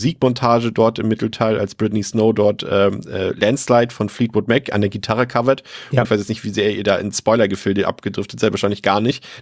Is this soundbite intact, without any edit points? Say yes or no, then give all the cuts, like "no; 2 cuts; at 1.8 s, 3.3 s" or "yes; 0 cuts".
no; 1 cut; at 6.0 s